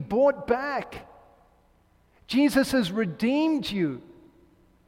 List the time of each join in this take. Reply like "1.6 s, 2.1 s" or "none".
none